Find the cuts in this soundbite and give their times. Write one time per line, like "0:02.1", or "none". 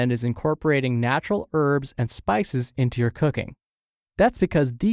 none